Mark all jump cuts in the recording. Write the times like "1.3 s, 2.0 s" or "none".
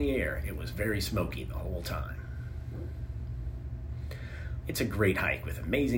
4.6 s